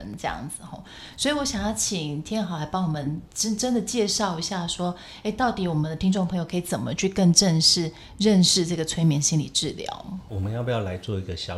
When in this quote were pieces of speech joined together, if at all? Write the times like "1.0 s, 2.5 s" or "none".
10.3 s